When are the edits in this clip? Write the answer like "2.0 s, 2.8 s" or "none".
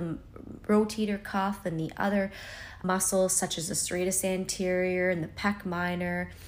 2.8 s